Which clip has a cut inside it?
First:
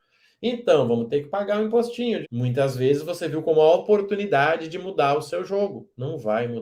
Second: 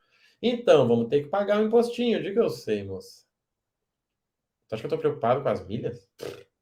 first; 1 cut; at 2.2 s

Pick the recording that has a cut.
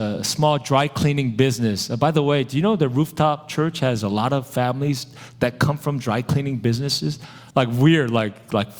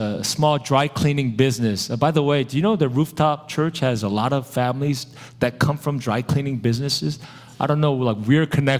first; 1 cut; at 7.5 s

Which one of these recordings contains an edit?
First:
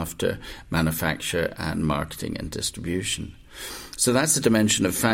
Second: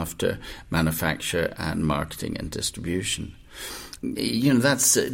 second; 1 cut; at 4.0 s

